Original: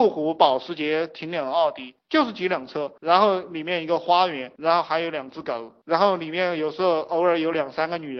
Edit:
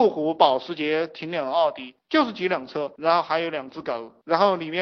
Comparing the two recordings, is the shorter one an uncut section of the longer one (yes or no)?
no